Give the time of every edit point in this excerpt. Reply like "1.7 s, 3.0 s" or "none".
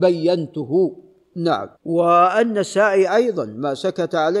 1.7 s

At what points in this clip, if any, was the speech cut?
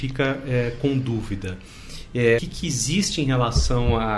2.4 s

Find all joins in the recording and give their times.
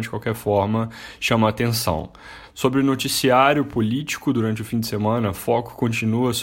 none

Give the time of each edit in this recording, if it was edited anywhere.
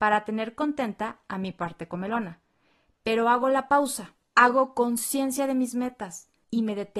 none

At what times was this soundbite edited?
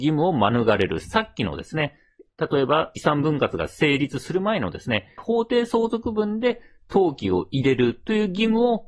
5.2 s

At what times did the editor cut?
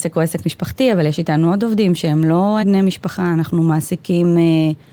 2.6 s

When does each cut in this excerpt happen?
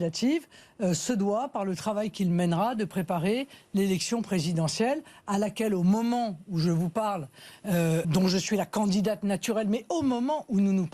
8.0 s

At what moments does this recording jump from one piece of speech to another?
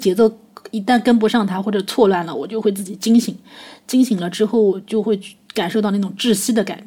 none

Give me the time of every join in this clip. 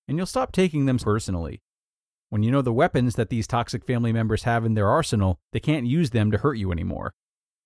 1.0 s, 5.5 s

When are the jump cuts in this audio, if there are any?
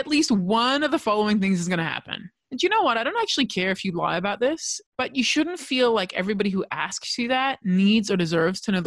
2.4 s, 4.9 s

